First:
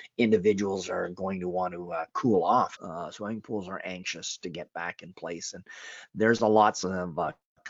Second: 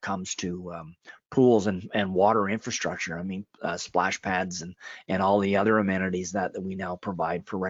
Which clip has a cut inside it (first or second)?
first